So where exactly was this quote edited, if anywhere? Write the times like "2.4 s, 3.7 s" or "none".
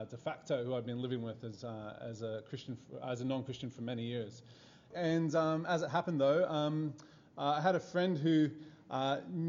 4.9 s